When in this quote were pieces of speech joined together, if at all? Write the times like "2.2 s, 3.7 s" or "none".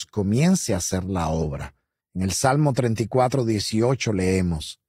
2.0 s